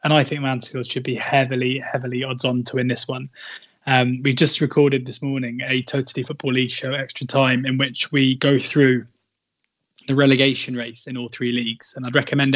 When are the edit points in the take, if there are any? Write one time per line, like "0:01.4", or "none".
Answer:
none